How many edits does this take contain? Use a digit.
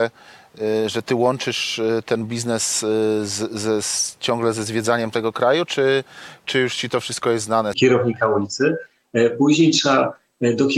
1